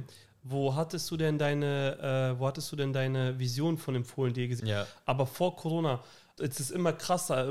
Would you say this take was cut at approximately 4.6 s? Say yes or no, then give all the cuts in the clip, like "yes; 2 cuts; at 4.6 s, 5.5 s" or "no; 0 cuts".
yes; 2 cuts; at 4.6 s, 6.4 s